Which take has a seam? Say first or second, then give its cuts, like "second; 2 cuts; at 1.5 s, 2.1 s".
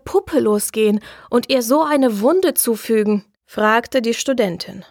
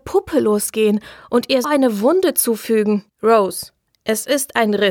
second; 2 cuts; at 1.6 s, 3.1 s